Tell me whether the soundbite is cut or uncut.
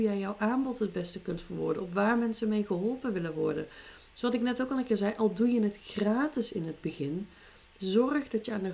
uncut